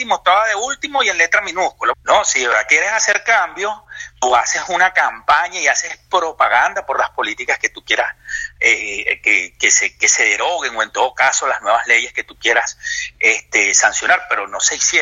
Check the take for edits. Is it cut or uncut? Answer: cut